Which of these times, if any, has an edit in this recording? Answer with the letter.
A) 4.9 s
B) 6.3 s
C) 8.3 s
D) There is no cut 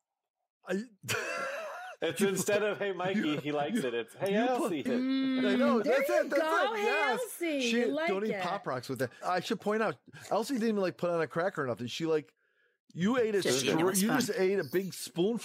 A